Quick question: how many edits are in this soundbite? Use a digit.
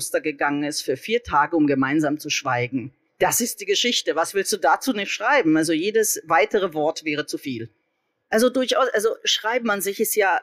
2